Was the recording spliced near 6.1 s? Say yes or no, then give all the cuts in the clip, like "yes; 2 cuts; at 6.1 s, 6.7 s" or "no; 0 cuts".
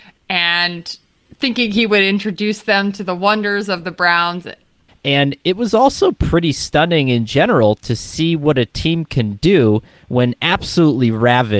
no; 1 cut; at 4.9 s